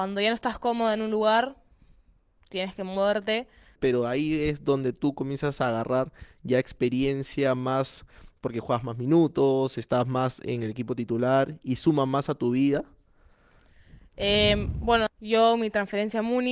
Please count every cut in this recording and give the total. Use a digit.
2